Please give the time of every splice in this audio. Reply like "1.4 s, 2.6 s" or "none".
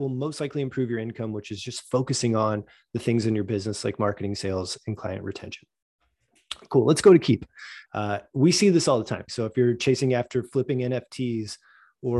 7.9 s, 9.3 s